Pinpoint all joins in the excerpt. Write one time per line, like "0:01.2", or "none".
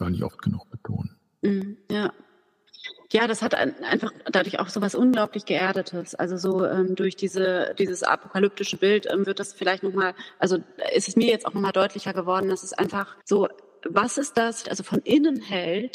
0:13.2
0:14.6